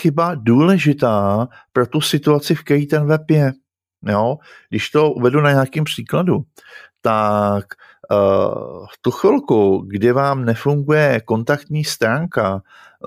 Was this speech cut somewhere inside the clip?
no; 0 cuts

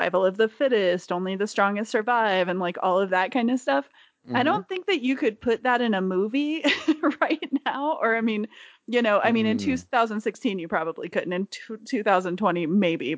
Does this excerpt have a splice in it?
no; 0 cuts

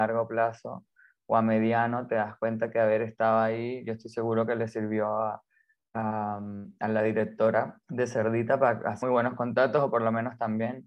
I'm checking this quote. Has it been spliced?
yes; 2 cuts; at 7.8 s, 9.0 s

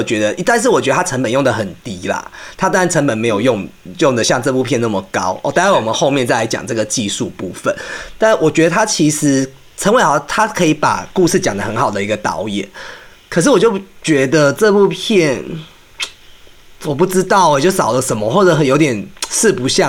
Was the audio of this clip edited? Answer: no; 0 cuts

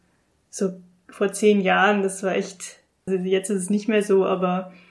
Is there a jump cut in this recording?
yes; 1 cut; at 3.1 s

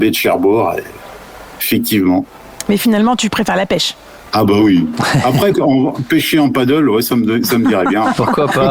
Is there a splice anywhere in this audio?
yes; 1 cut; at 5.5 s

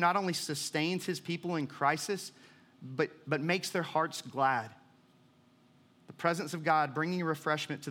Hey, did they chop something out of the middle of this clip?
no; 0 cuts

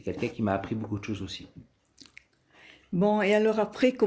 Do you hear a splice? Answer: no; 0 cuts

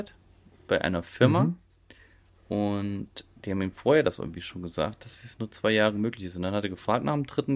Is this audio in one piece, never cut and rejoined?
yes; 0 cuts

